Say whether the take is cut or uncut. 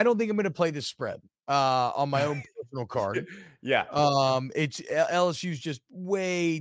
uncut